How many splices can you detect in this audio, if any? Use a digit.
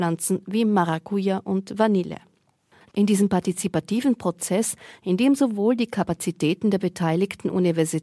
1